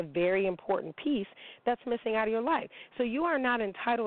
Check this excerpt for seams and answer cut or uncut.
uncut